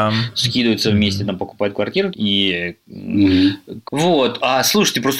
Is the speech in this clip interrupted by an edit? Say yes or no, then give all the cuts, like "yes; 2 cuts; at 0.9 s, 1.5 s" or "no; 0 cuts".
yes; 2 cuts; at 2.1 s, 3.8 s